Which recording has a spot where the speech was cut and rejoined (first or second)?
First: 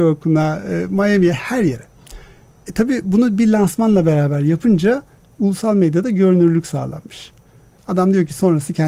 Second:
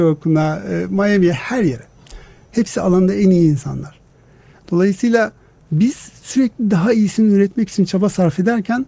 second